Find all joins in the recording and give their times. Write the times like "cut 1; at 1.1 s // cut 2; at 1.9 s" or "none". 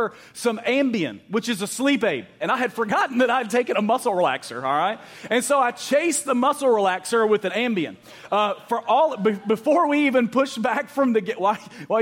cut 1; at 2.4 s